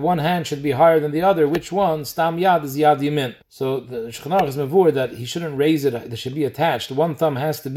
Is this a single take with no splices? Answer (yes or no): no